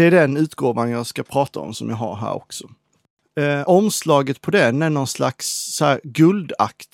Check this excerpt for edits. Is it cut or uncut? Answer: uncut